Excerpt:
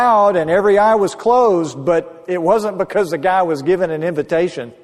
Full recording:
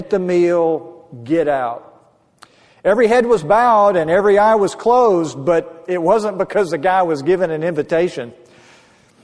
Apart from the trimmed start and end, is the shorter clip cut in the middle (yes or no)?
no